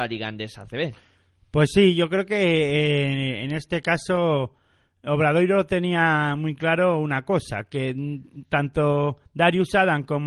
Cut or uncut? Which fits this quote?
uncut